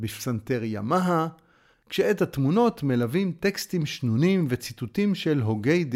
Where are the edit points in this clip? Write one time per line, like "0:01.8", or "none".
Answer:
0:01.7